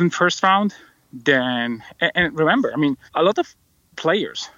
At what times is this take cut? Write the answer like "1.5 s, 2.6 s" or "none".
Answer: 3.1 s